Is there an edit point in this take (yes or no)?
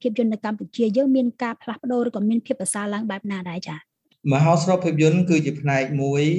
no